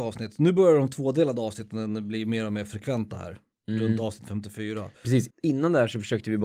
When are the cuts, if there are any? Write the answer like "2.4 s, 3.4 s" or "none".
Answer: 5.3 s